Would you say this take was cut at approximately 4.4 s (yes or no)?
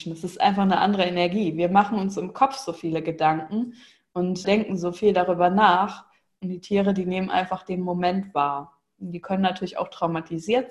yes